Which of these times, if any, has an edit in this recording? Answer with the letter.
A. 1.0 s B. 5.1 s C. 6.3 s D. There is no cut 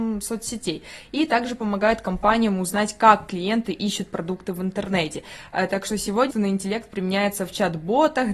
C